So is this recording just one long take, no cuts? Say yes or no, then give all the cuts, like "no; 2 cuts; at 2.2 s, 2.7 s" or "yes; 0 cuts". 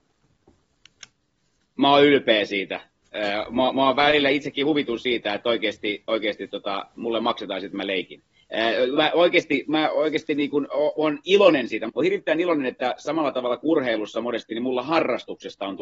no; 1 cut; at 11.9 s